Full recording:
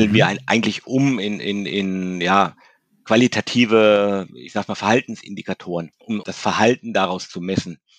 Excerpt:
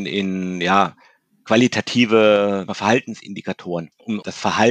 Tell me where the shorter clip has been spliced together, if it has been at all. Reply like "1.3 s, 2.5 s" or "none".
2.7 s